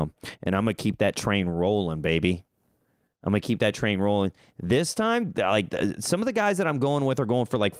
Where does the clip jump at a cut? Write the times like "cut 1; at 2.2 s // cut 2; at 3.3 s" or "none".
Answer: none